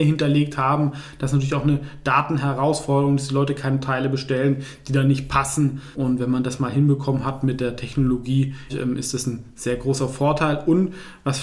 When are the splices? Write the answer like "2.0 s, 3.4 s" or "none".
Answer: 5.9 s, 8.7 s